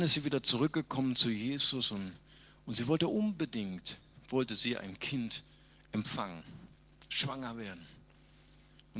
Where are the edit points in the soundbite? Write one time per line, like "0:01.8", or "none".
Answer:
none